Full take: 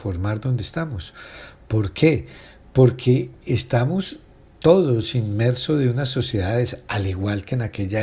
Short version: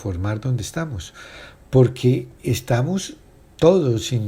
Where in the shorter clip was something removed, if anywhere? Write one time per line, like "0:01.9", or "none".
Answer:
0:01.6